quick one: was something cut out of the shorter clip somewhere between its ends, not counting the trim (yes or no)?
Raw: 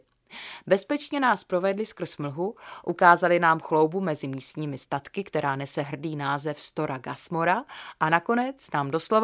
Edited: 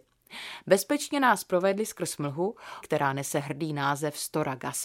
yes